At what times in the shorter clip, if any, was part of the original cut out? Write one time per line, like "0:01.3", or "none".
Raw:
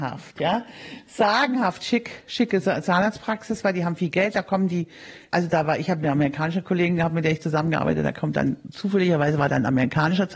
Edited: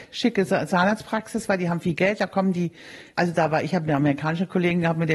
none